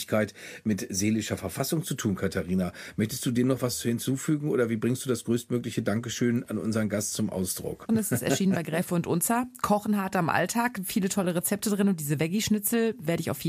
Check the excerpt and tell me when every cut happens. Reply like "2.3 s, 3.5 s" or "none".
7.9 s